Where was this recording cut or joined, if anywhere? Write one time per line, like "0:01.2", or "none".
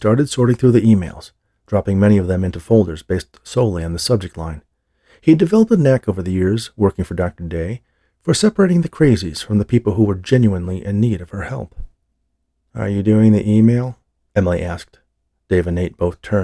none